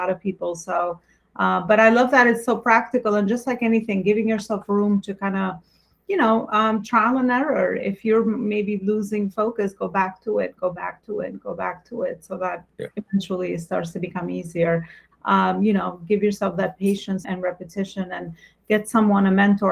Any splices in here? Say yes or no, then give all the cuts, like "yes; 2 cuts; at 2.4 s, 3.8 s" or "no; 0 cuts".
yes; 2 cuts; at 15.1 s, 17.2 s